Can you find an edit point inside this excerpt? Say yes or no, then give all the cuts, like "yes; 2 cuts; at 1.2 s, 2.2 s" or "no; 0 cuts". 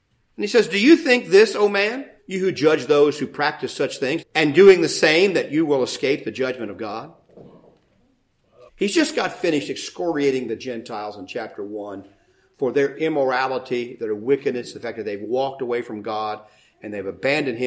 yes; 3 cuts; at 2.2 s, 4.2 s, 8.7 s